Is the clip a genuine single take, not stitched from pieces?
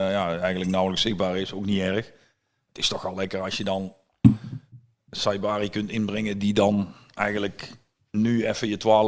yes; 0 cuts

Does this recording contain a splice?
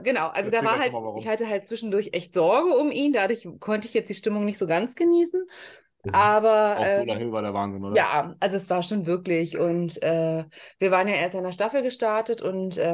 no; 0 cuts

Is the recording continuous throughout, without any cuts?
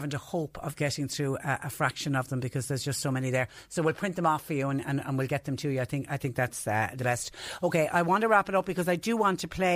yes; 0 cuts

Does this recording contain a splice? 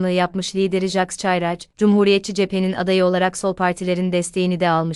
yes; 1 cut; at 1.7 s

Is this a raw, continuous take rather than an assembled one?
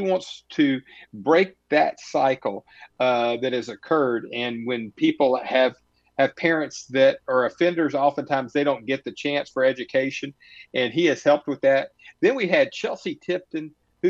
yes; 0 cuts

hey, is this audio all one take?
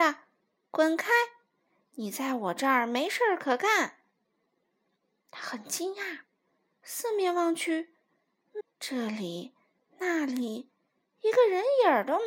no; 1 cut; at 8.6 s

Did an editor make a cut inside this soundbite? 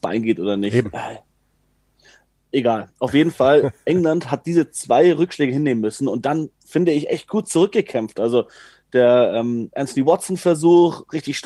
no; 0 cuts

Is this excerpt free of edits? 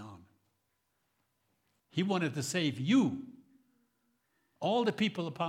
no; 1 cut; at 1.8 s

